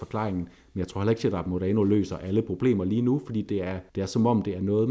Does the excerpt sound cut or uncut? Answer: cut